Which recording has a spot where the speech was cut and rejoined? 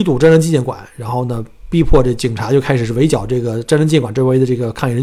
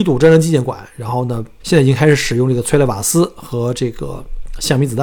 second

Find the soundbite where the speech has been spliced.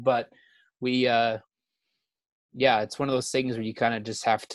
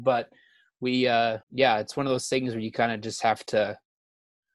second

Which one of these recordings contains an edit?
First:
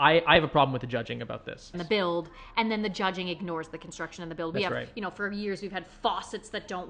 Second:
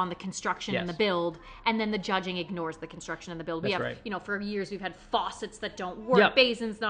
first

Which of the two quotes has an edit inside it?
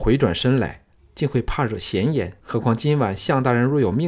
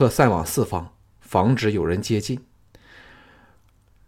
first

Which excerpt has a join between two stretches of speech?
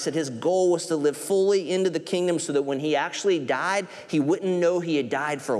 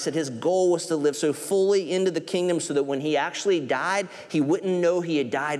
first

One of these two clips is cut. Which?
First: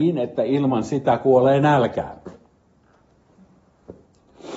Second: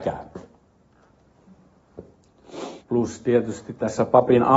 second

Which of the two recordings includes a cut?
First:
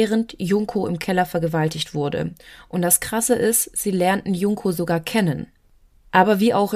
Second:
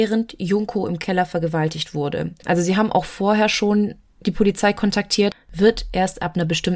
second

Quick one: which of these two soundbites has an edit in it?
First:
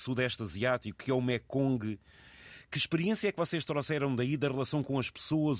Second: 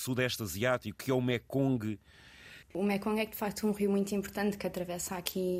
second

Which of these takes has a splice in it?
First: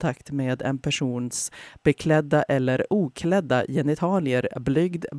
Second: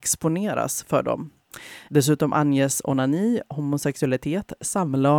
second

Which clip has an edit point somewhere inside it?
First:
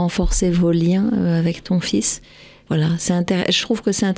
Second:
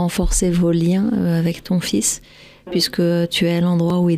first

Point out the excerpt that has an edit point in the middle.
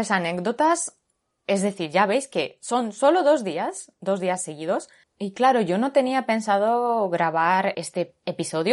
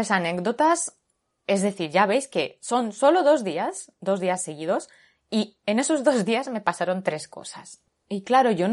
first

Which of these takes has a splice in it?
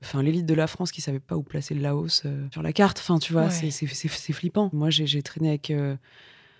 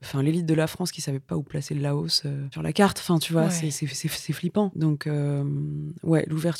first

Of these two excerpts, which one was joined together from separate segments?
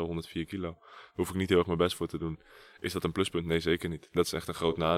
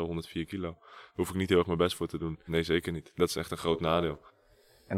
second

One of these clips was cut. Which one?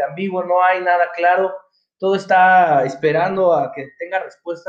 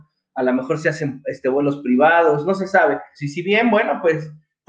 second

